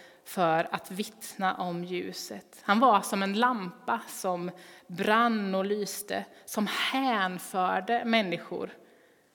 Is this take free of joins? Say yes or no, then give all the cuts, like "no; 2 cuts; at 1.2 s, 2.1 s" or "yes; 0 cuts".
yes; 0 cuts